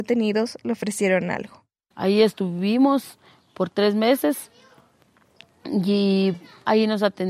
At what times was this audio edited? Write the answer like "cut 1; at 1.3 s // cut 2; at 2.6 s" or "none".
cut 1; at 1.9 s